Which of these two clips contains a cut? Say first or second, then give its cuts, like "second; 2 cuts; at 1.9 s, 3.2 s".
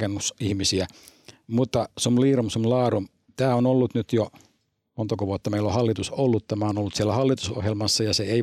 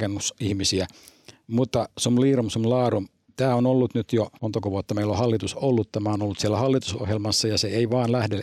second; 1 cut; at 4.4 s